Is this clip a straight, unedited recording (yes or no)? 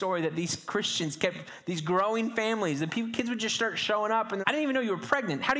no